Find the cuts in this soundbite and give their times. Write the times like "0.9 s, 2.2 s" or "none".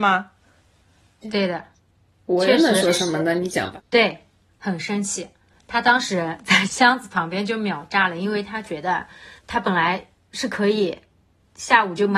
1.2 s, 6.7 s, 9.4 s